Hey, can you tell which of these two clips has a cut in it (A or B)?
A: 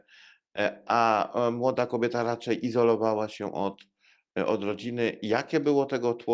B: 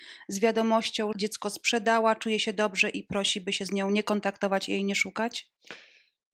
B